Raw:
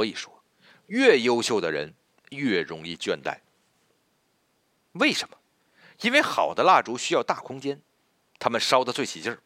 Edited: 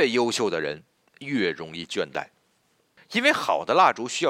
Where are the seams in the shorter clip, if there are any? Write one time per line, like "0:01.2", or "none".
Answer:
0:03.0